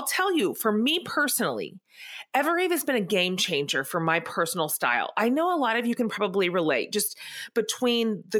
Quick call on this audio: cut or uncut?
uncut